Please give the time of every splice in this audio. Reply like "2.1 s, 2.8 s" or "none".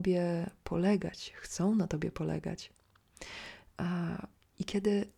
none